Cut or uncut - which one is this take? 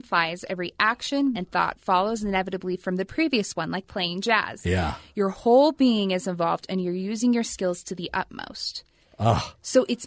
cut